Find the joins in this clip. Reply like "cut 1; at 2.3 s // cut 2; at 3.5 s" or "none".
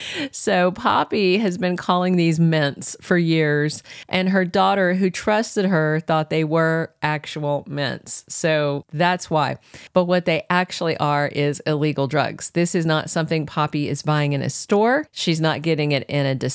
none